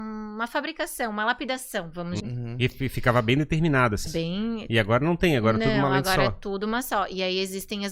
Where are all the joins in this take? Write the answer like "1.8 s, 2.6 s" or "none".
2.2 s, 4.1 s